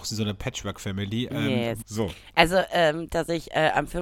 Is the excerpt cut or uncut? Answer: cut